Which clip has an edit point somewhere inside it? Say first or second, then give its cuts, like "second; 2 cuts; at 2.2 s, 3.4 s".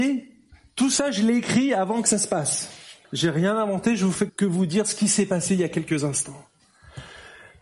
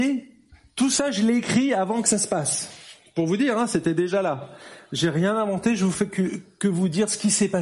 first; 2 cuts; at 3.0 s, 4.3 s